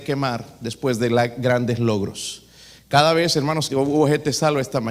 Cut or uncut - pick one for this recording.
cut